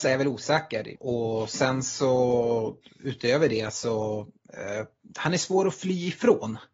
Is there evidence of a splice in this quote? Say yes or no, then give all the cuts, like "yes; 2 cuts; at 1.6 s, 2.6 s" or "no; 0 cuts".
yes; 1 cut; at 1.0 s